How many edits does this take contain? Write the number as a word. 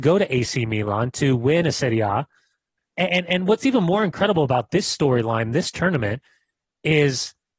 one